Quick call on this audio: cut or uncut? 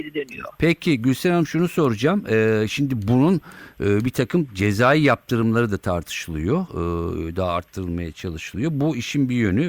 uncut